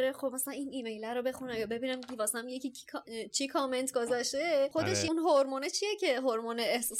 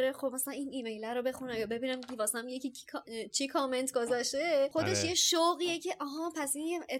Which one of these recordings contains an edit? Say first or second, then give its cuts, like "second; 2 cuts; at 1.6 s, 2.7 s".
first; 1 cut; at 5.1 s